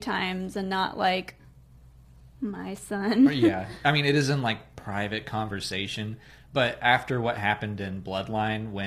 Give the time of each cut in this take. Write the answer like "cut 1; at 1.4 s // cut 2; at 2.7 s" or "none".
none